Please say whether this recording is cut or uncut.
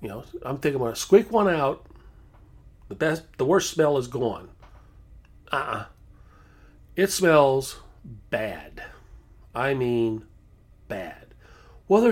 cut